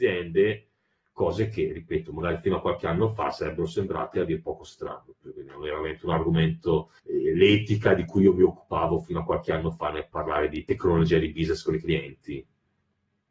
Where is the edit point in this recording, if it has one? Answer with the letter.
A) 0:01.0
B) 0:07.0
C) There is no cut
B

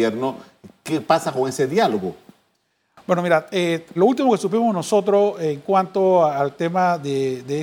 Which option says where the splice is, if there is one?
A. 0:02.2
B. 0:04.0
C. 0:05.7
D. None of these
B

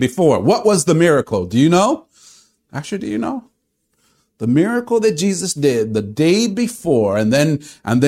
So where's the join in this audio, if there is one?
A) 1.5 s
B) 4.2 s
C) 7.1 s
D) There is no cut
D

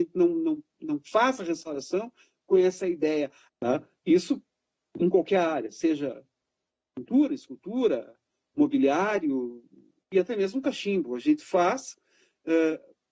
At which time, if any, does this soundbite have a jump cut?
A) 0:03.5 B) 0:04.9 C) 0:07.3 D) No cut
A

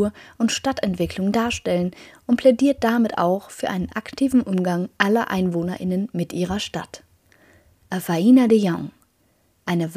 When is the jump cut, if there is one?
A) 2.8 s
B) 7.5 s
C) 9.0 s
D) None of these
D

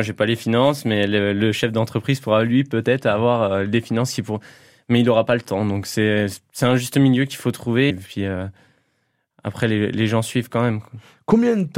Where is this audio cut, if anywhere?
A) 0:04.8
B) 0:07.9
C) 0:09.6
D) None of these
B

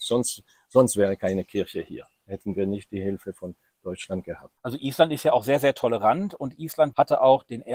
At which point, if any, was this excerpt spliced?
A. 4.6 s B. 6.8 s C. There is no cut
A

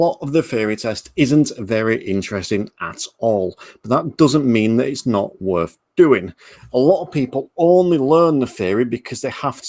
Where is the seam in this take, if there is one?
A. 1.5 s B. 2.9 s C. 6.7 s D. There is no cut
D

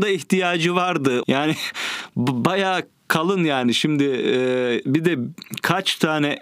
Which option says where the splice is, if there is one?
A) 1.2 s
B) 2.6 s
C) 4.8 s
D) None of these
A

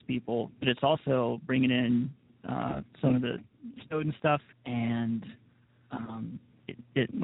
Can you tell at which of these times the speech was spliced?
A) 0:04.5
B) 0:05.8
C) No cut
A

